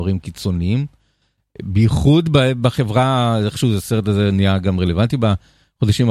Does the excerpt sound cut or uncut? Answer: uncut